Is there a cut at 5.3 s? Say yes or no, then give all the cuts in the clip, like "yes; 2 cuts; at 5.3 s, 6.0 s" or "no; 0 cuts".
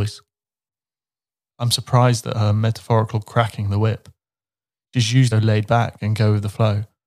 yes; 1 cut; at 5.3 s